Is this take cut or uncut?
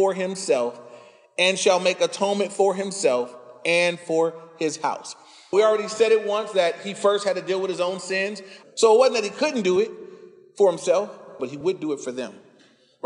cut